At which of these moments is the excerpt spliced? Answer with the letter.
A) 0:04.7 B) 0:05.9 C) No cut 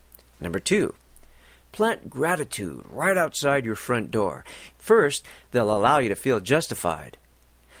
A